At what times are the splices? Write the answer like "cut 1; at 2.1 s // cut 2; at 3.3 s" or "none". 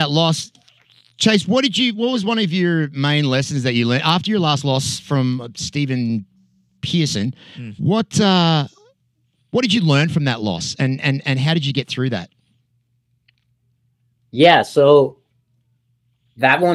none